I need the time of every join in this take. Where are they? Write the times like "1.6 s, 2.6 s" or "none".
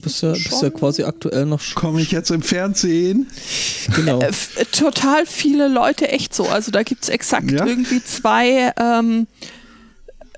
none